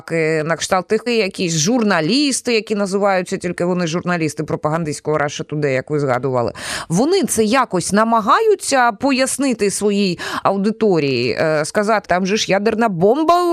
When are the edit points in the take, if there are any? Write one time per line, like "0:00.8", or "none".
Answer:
0:01.1
0:12.0